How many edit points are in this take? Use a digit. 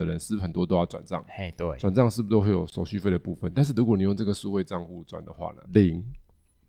1